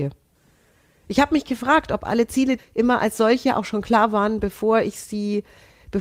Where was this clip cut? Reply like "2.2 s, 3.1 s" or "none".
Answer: 2.6 s